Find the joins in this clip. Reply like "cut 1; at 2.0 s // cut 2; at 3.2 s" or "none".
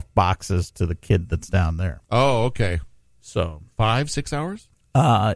none